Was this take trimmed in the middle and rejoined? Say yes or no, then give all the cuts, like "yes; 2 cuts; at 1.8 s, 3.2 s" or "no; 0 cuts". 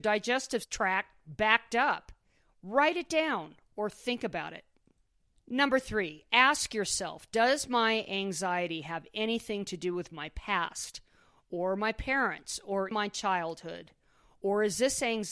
yes; 2 cuts; at 5.3 s, 12.9 s